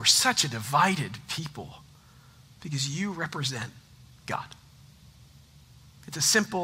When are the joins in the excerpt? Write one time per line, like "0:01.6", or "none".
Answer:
0:02.6